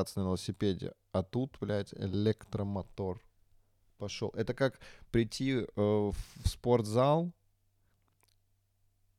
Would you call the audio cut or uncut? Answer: uncut